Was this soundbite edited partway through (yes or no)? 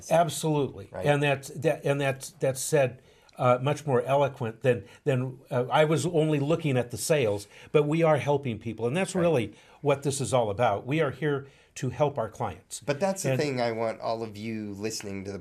no